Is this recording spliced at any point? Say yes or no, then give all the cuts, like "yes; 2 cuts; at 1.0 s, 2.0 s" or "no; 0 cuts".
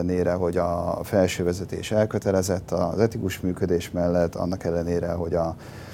no; 0 cuts